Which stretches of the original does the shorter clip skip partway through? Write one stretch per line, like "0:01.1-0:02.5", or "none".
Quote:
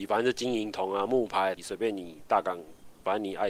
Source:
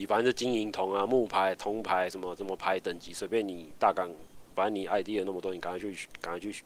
0:01.6-0:03.1